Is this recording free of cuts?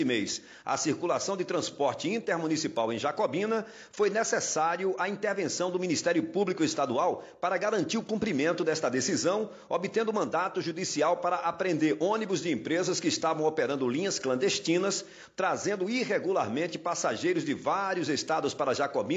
yes; 0 cuts

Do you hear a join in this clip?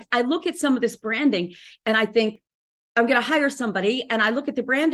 no; 0 cuts

